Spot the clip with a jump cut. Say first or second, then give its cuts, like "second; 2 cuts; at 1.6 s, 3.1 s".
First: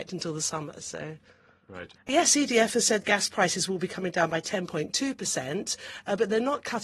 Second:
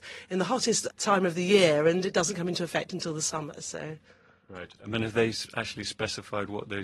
first; 1 cut; at 2.0 s